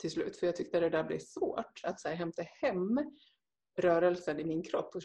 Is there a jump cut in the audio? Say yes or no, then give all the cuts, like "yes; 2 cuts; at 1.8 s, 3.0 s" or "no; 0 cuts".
yes; 1 cut; at 1.8 s